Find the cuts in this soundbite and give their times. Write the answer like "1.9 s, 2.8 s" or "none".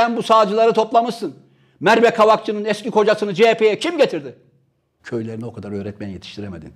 5.0 s

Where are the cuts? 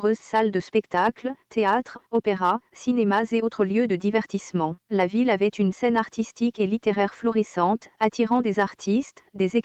4.8 s

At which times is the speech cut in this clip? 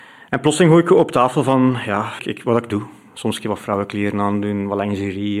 2.2 s

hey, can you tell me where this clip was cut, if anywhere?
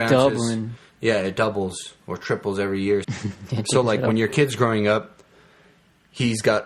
3.0 s

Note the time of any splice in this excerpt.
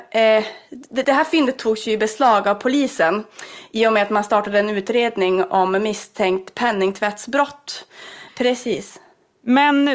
1.0 s, 8.3 s

